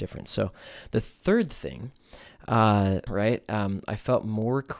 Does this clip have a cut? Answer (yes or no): yes